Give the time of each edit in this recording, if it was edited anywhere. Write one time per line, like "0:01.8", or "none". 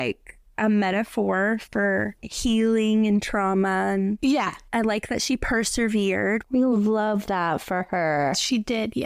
0:06.4